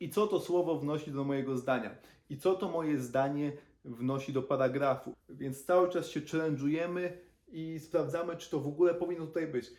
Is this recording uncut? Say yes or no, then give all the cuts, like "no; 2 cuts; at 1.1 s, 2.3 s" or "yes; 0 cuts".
no; 1 cut; at 5.1 s